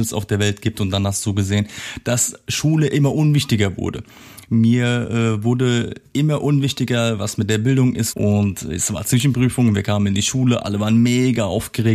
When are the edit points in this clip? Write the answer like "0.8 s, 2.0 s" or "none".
8.1 s